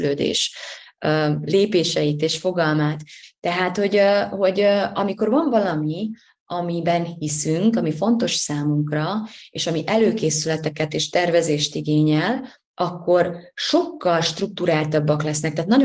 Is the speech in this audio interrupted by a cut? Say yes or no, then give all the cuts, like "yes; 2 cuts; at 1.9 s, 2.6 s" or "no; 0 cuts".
no; 0 cuts